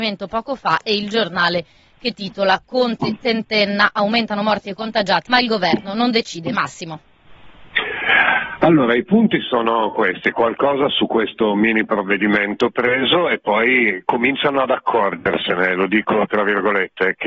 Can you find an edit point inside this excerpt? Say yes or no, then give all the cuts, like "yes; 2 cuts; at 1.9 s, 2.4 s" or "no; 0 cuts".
yes; 1 cut; at 5.3 s